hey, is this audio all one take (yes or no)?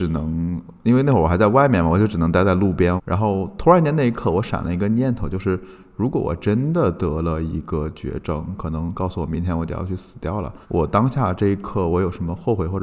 no